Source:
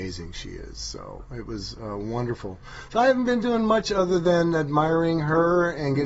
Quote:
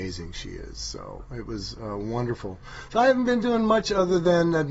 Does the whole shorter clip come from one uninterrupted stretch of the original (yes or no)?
yes